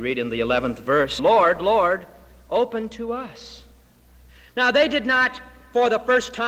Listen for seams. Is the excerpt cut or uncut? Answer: cut